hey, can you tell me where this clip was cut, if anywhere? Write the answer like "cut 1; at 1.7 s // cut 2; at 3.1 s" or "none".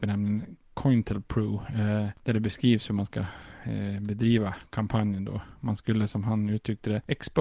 none